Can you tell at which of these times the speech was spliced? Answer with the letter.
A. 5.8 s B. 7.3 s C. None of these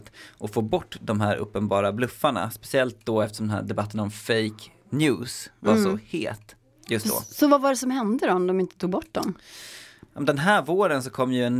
C